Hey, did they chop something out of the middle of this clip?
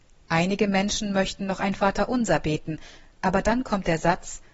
no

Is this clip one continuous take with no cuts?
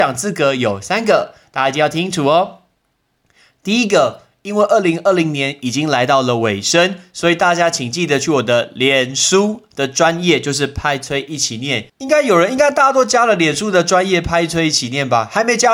no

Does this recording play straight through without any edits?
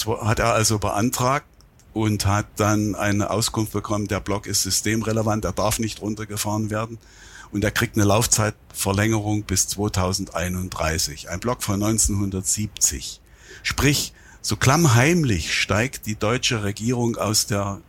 yes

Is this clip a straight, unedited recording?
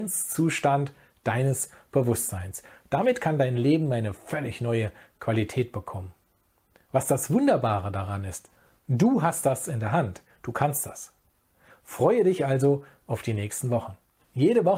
yes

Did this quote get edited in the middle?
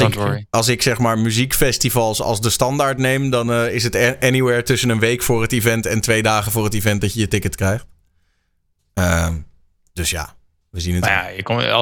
no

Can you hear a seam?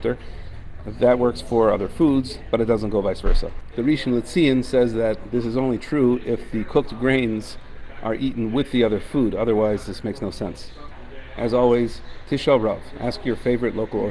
yes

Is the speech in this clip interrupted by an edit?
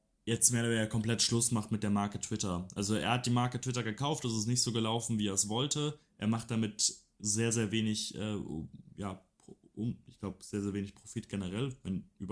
no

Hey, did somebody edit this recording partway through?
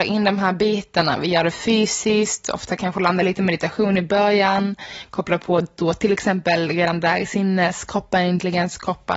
no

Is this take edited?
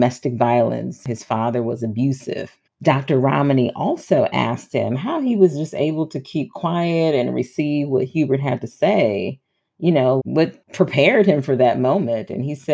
yes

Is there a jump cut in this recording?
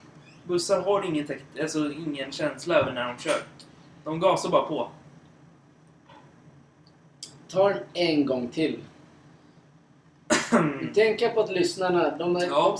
no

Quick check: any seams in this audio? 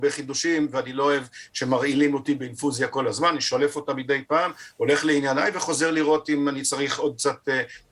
no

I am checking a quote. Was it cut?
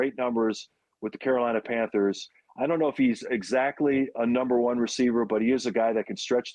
no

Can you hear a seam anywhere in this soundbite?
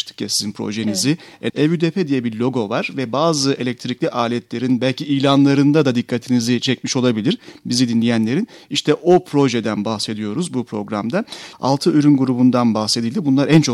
yes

